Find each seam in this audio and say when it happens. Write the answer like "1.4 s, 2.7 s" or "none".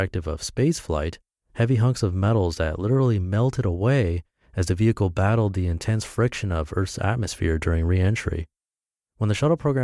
none